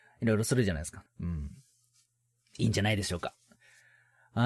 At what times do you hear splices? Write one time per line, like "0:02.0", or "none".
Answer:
0:01.1